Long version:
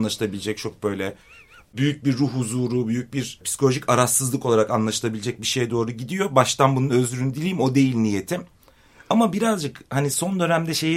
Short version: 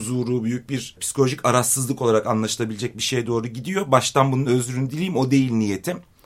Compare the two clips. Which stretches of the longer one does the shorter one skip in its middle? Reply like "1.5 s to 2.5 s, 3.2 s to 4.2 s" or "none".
none